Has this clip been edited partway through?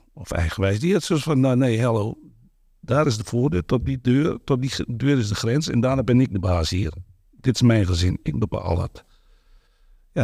no; 0 cuts

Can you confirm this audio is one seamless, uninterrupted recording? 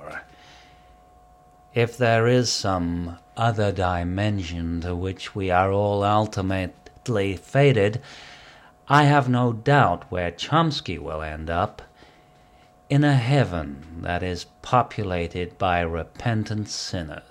yes; 0 cuts

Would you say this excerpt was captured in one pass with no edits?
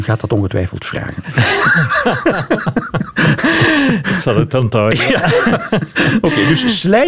yes; 0 cuts

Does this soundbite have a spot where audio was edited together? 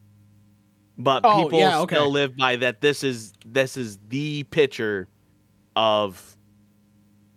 no; 0 cuts

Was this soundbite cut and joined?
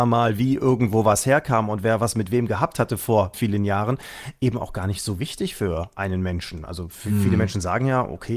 yes; 1 cut; at 3.3 s

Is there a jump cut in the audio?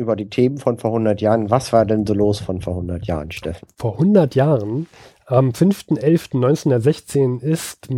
no; 0 cuts

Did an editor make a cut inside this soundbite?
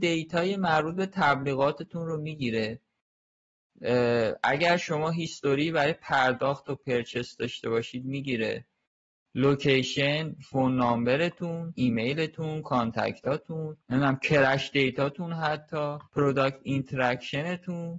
yes; 3 cuts; at 11.8 s, 13.8 s, 16.1 s

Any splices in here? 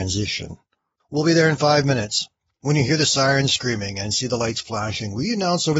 yes; 1 cut; at 1.0 s

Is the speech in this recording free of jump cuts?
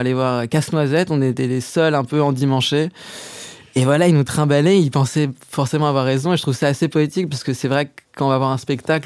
yes; 0 cuts

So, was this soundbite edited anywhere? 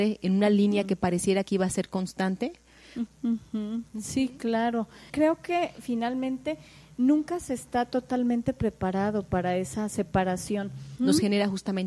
yes; 3 cuts; at 3.1 s, 5.1 s, 11.0 s

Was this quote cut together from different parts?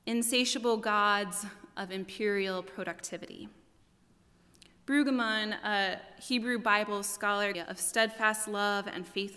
yes; 1 cut; at 7.5 s

